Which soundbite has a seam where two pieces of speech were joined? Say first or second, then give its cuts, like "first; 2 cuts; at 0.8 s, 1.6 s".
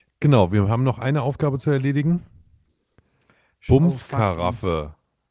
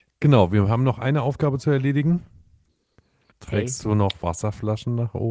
second; 1 cut; at 3.3 s